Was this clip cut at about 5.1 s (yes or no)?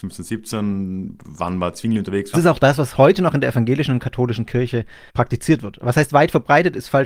yes